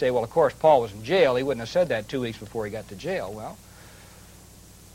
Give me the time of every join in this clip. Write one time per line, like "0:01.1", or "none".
none